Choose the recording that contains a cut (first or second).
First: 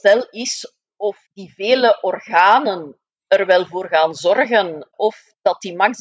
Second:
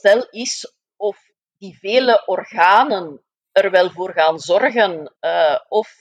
first